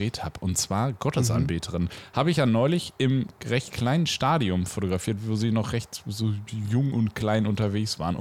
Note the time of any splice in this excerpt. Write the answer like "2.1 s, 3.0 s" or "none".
none